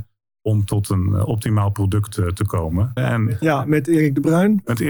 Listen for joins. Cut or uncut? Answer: cut